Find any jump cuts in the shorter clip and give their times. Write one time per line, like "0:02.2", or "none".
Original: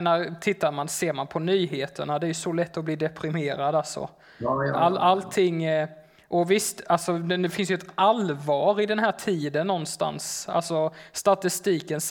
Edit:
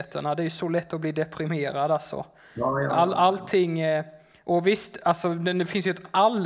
none